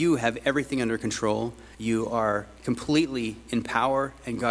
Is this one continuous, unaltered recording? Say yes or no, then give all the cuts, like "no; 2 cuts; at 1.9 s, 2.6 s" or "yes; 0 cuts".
no; 1 cut; at 1.7 s